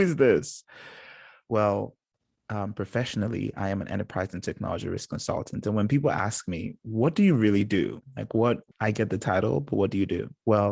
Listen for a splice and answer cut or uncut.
uncut